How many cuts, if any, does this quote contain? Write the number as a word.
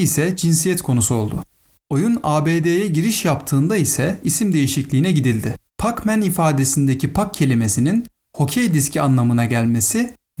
two